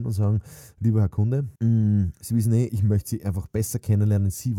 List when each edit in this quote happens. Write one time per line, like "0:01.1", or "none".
0:01.6
0:02.7